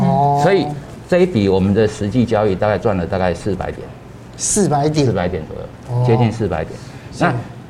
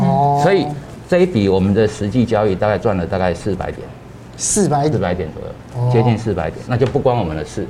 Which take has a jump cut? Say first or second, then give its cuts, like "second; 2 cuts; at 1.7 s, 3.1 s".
second; 2 cuts; at 4.9 s, 6.6 s